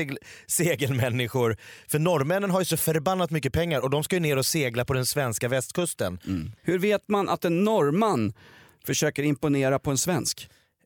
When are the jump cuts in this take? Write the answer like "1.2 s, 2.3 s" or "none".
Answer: 6.6 s